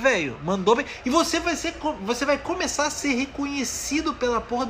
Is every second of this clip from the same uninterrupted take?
yes; 0 cuts

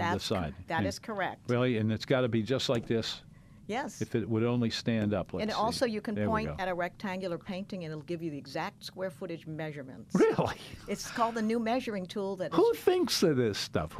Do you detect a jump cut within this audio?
no; 0 cuts

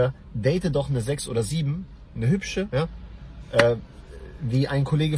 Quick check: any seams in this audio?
yes; 1 cut; at 2.7 s

